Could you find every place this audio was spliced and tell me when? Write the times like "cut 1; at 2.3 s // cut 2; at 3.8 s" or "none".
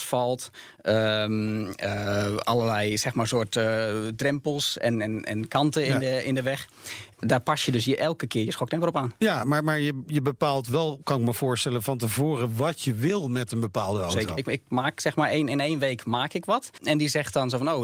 cut 1; at 14.4 s // cut 2; at 16.8 s